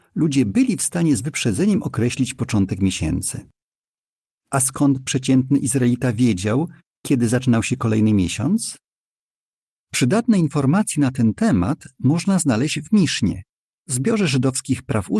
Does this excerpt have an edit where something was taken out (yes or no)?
no